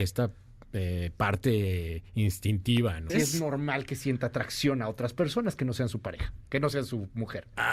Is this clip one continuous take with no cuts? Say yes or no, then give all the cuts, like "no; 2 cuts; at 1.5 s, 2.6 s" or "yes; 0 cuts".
no; 1 cut; at 3.1 s